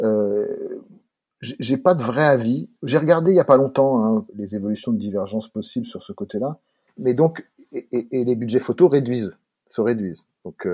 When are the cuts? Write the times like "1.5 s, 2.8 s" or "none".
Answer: 4.3 s, 6.9 s